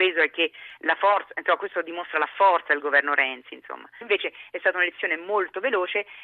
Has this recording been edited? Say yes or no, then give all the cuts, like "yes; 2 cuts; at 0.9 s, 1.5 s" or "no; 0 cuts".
yes; 1 cut; at 4.0 s